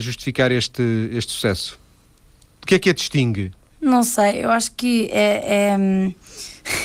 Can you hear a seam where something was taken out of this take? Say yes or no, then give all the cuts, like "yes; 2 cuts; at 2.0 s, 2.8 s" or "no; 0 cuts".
no; 0 cuts